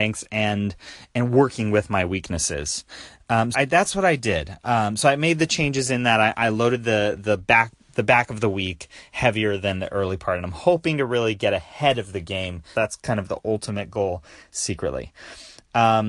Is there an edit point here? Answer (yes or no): yes